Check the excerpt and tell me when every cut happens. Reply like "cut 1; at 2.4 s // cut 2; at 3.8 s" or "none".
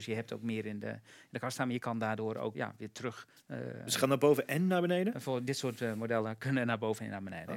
cut 1; at 2.5 s